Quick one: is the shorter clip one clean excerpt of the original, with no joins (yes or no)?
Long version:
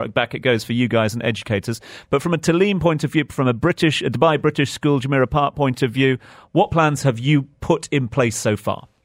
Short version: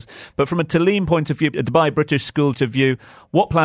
no